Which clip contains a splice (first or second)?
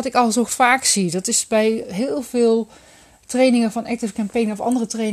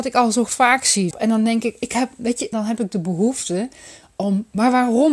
second